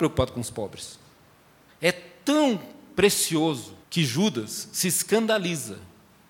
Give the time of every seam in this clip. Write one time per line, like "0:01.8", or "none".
0:01.7
0:03.8